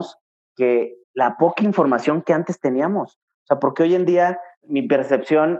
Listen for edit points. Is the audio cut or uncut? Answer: cut